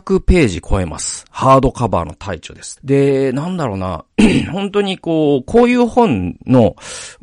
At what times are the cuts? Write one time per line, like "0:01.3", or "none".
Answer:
0:02.8